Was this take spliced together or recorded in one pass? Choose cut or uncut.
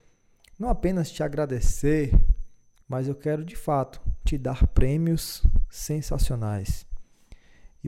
cut